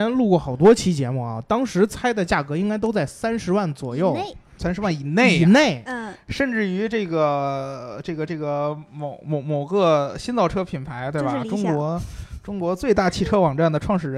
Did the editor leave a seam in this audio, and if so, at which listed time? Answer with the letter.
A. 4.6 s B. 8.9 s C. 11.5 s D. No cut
D